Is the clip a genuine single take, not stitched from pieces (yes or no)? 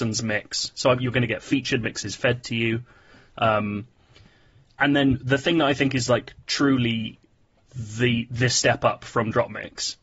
yes